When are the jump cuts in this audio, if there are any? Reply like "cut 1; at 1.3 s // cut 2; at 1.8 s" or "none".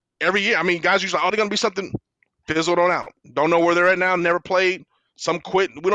cut 1; at 1.3 s